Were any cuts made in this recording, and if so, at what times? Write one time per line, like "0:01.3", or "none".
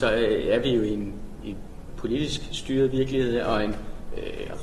none